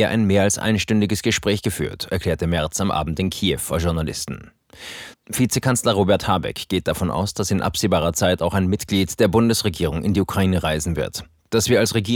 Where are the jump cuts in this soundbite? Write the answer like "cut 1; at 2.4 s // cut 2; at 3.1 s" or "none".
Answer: cut 1; at 5.1 s